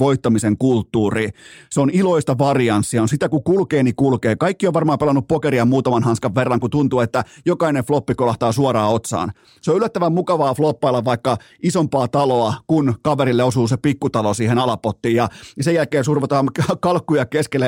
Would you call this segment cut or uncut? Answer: uncut